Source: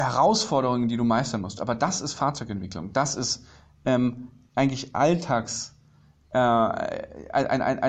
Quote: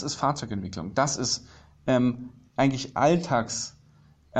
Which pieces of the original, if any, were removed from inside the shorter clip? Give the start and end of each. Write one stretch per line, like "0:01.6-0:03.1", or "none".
none